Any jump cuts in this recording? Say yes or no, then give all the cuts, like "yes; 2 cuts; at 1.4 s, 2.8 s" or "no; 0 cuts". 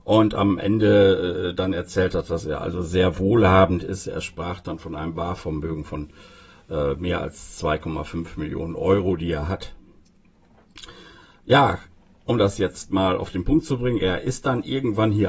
no; 0 cuts